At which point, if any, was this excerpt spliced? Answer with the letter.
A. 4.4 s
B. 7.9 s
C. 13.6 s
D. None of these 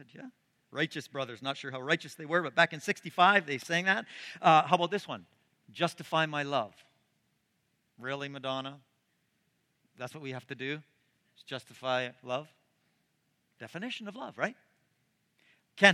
C